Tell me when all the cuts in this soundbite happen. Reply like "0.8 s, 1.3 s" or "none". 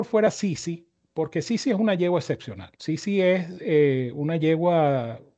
2.7 s